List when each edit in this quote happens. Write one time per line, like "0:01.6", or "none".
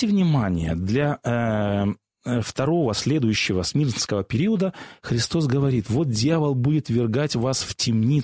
none